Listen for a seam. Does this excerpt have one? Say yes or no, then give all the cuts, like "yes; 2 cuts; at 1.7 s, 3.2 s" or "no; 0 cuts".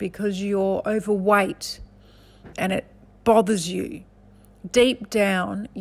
yes; 1 cut; at 2.5 s